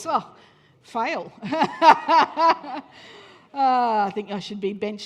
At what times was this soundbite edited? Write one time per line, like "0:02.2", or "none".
none